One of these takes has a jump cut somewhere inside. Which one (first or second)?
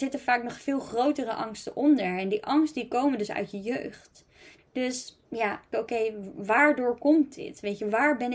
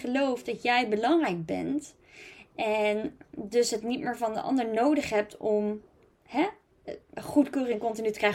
first